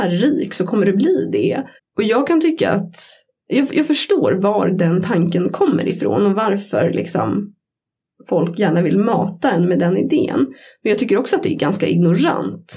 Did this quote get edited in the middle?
yes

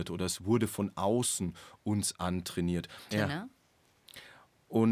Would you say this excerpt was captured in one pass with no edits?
no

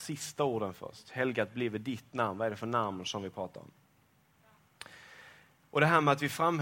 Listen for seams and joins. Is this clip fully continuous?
yes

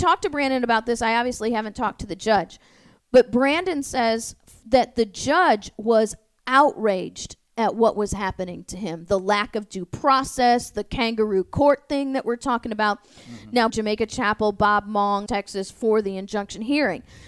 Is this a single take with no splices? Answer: no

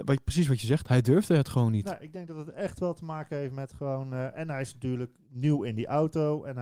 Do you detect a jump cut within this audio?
no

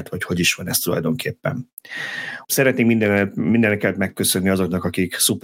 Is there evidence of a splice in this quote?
yes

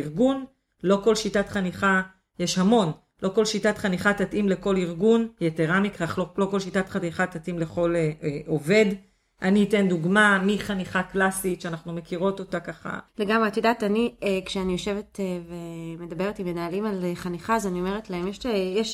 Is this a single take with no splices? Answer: no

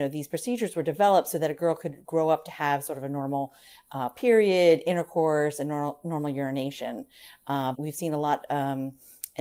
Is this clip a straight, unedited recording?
no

